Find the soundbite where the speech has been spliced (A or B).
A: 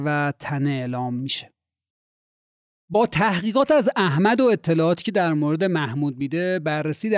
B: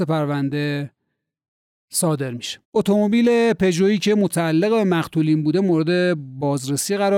B